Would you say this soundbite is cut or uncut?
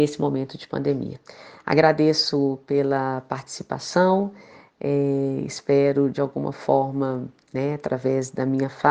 uncut